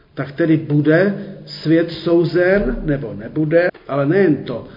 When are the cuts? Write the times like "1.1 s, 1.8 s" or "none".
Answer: 3.7 s